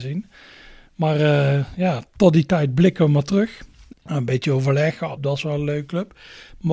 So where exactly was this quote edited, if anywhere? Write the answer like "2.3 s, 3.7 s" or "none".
3.9 s, 5.2 s